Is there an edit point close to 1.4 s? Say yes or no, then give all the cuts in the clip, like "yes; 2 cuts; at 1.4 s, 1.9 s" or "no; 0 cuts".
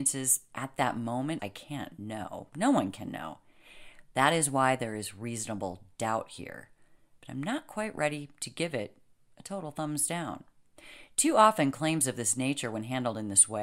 yes; 1 cut; at 1.4 s